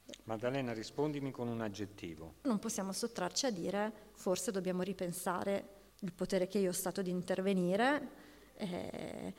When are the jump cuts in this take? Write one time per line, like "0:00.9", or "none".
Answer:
0:02.4
0:05.9